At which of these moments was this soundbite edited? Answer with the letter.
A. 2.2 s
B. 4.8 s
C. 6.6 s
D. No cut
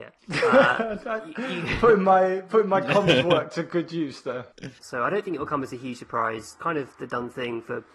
B